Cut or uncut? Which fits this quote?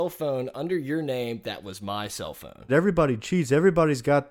cut